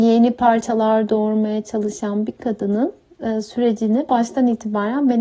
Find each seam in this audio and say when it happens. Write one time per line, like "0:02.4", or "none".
none